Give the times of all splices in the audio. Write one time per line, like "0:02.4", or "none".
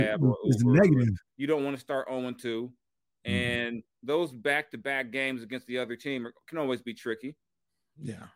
0:01.3